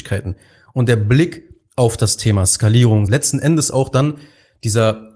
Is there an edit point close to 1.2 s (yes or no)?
no